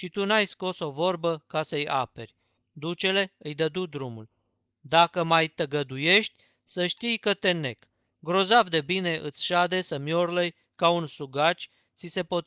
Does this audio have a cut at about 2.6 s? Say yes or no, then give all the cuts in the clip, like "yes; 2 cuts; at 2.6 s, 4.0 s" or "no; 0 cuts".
yes; 1 cut; at 2.6 s